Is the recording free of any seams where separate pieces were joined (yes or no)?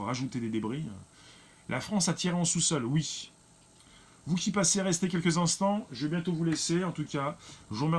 yes